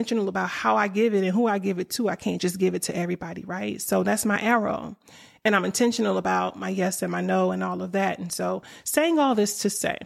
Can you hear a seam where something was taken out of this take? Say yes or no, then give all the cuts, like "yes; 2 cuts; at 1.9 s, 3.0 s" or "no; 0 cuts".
no; 0 cuts